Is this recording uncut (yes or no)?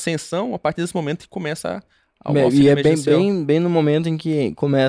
yes